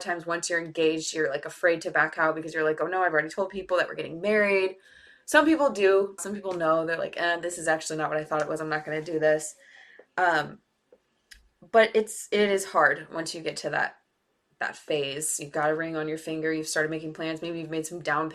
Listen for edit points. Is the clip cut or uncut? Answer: cut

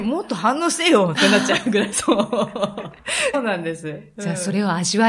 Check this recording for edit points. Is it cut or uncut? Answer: cut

